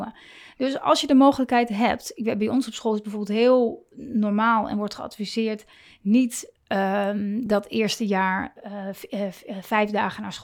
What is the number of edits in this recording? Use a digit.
0